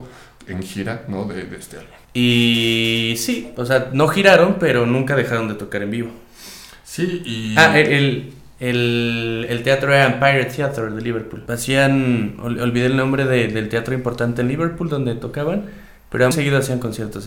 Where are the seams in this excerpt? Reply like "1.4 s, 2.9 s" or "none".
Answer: 2.0 s, 11.5 s, 16.3 s